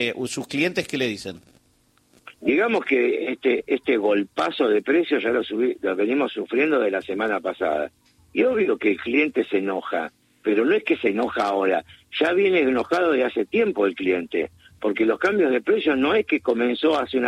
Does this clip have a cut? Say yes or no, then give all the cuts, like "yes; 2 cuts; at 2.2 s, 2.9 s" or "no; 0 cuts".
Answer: yes; 1 cut; at 2.4 s